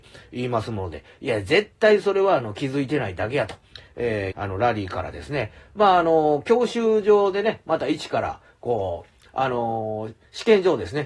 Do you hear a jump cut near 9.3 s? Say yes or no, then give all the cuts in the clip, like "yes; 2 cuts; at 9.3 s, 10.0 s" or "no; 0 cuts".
yes; 2 cuts; at 4.3 s, 9.3 s